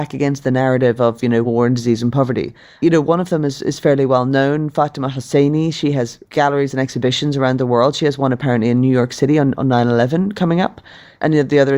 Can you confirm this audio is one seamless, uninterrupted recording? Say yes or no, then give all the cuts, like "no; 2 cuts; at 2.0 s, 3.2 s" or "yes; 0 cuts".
yes; 0 cuts